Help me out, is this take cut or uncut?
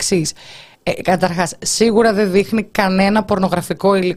uncut